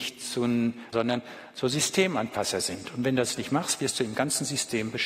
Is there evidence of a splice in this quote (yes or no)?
yes